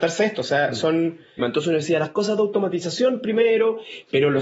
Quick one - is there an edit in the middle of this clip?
yes; 1 cut; at 1.4 s

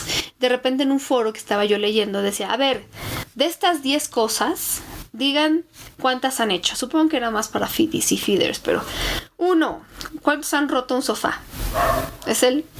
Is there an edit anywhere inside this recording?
no; 0 cuts

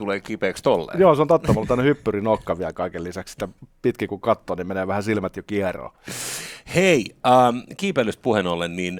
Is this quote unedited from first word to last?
yes; 0 cuts

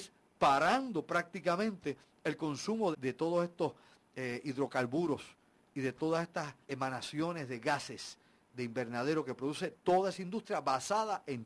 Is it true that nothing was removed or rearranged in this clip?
no; 2 cuts; at 2.9 s, 6.6 s

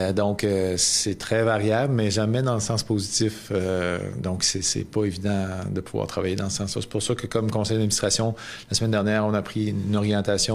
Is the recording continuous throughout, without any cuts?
yes; 0 cuts

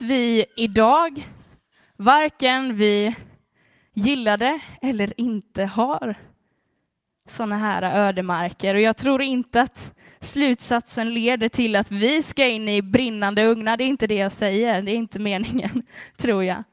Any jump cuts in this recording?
no; 0 cuts

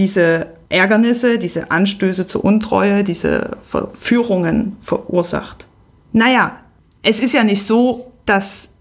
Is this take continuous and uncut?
yes; 0 cuts

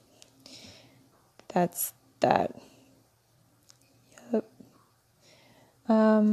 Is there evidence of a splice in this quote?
no; 0 cuts

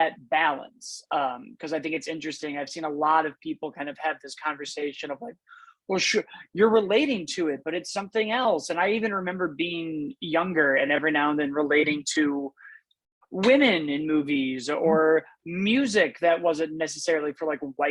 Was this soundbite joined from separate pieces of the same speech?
no; 0 cuts

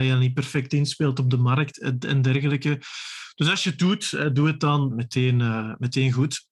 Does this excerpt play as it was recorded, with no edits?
no; 1 cut; at 4.9 s

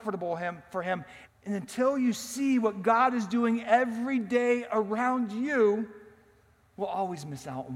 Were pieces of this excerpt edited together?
yes; 1 cut; at 1.3 s

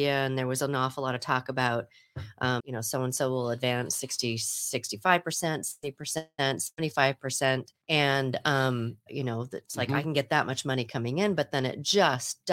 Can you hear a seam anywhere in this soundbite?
yes; 3 cuts; at 2.6 s, 7.8 s, 9.1 s

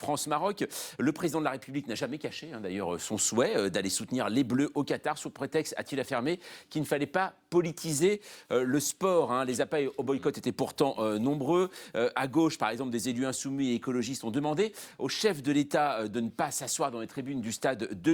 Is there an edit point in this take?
no; 0 cuts

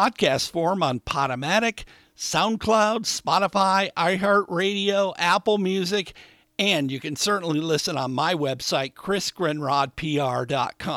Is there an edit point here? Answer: no; 0 cuts

